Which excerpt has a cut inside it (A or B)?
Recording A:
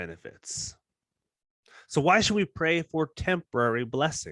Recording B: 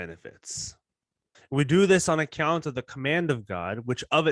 B